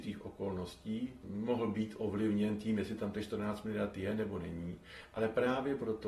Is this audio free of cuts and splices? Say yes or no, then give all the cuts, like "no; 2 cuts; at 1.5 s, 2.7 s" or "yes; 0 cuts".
yes; 0 cuts